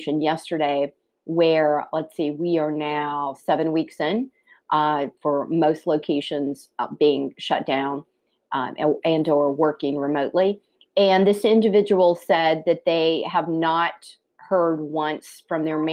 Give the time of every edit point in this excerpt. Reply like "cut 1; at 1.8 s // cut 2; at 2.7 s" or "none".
none